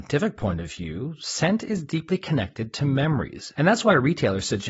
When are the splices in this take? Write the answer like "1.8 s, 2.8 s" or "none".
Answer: 3.5 s